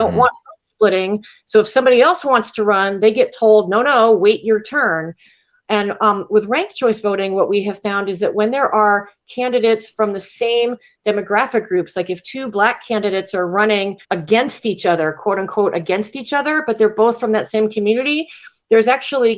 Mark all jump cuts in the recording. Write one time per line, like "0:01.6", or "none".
0:14.0